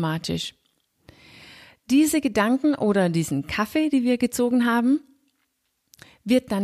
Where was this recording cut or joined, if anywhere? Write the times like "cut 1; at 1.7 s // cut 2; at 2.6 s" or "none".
none